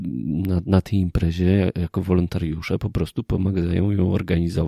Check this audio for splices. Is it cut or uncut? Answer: uncut